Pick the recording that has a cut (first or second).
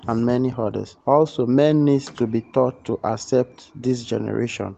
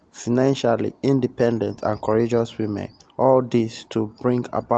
first